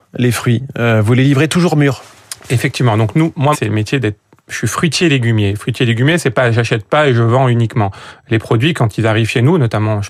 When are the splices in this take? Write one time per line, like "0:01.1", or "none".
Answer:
0:03.5